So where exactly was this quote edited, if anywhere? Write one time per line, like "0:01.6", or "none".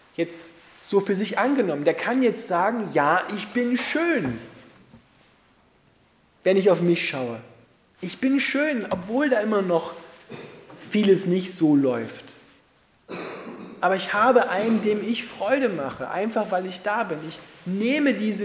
none